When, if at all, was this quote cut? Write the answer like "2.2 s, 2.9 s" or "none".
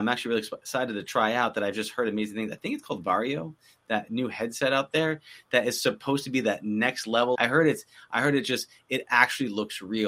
7.3 s